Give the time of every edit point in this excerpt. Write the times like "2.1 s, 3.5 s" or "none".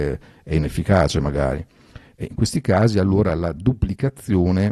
none